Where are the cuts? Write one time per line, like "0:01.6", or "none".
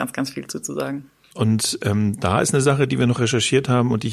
0:01.3